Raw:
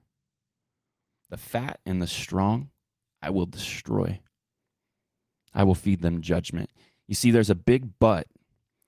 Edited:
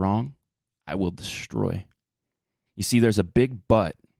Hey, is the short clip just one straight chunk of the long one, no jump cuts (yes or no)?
no